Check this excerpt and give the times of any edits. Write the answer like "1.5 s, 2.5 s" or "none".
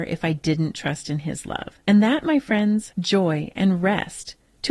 1.8 s, 2.9 s